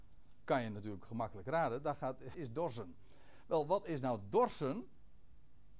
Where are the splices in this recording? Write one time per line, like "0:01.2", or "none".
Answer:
0:02.3